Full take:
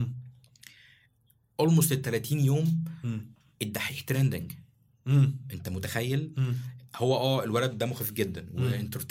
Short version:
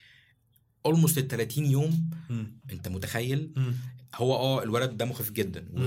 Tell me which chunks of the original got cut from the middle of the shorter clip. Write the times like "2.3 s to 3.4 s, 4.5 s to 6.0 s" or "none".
3.4 s to 5.4 s